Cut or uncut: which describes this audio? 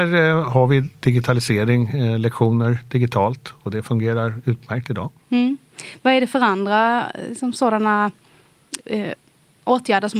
uncut